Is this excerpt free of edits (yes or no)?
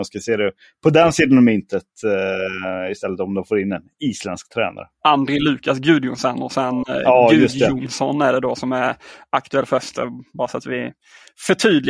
yes